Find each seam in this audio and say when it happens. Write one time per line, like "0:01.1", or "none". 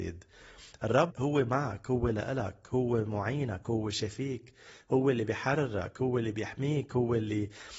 0:01.1